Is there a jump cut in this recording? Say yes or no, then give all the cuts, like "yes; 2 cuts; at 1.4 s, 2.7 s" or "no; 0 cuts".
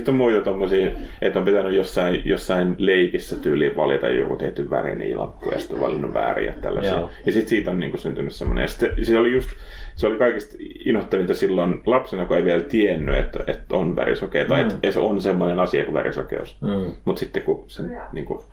no; 0 cuts